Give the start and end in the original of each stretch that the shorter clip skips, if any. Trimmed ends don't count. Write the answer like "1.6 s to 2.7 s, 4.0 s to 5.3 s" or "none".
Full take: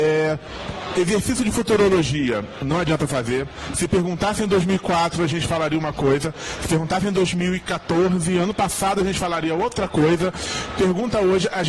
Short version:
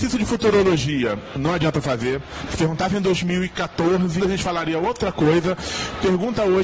3.7 s to 6.6 s, 8.3 s to 9.0 s

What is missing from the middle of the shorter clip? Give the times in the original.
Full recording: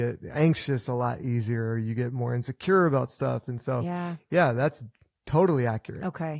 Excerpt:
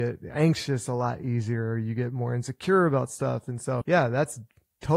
3.8 s to 4.3 s

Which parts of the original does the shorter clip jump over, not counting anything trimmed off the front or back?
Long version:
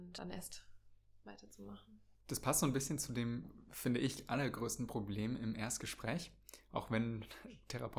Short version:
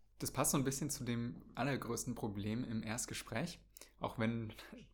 3.6 s to 4.3 s

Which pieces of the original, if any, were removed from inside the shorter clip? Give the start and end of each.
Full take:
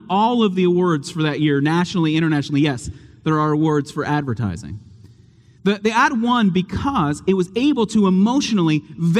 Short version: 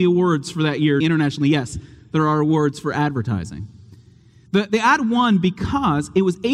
1.6 s to 2.1 s

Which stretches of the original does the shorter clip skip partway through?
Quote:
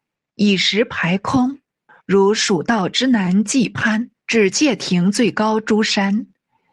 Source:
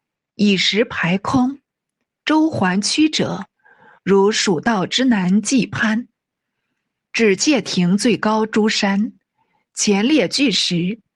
1.9 s to 3.9 s, 6.2 s to 7.0 s

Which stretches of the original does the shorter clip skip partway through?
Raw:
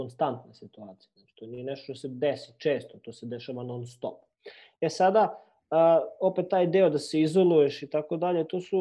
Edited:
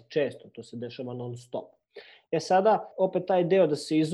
5.4 s to 6.1 s

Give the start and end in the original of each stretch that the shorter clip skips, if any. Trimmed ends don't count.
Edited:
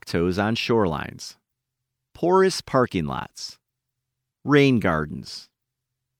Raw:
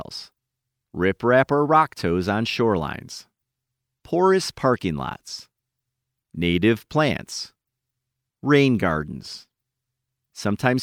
6.1 s to 8.2 s

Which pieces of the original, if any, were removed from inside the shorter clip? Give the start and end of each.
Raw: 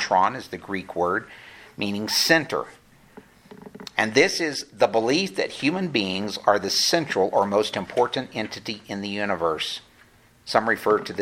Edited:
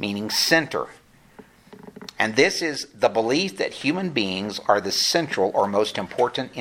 none

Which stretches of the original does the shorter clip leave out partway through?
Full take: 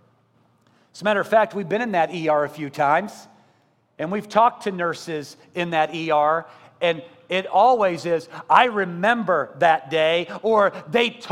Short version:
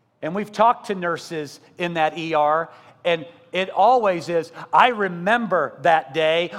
none

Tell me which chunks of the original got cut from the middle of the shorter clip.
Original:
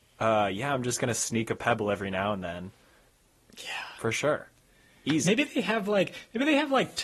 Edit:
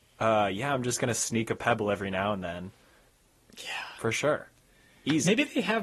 none

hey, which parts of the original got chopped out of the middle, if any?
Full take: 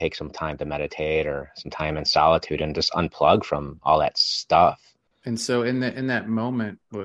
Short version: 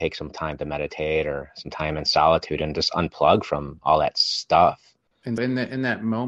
5.4 s to 5.6 s

